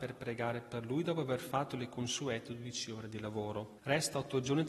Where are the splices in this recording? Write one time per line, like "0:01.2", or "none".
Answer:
0:03.8